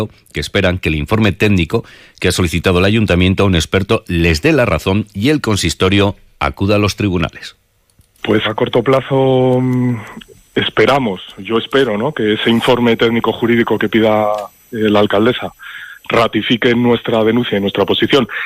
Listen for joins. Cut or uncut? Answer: cut